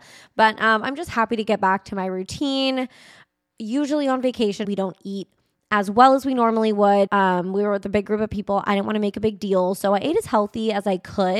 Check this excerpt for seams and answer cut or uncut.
cut